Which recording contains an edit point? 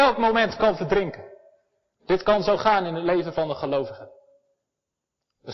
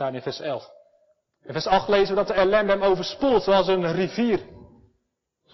first; 1 cut; at 1.9 s

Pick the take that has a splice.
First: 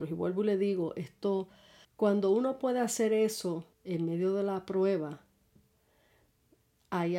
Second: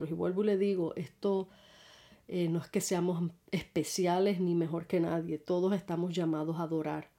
first; 2 cuts; at 1.8 s, 3.7 s

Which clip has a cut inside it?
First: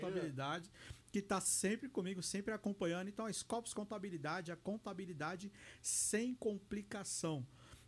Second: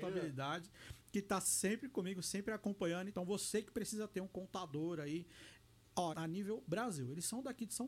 second; 2 cuts; at 3.1 s, 6.1 s

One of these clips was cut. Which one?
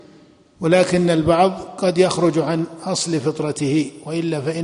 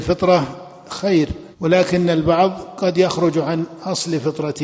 second; 1 cut; at 1.5 s

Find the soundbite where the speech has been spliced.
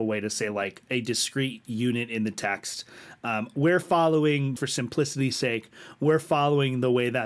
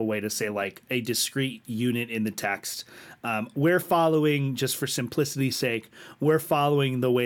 first; 1 cut; at 4.6 s

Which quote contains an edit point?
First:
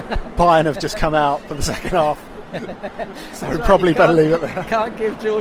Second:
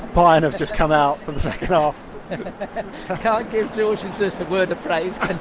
second; 1 cut; at 3.1 s

